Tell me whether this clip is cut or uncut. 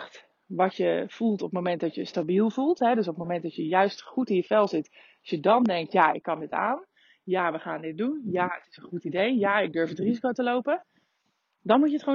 uncut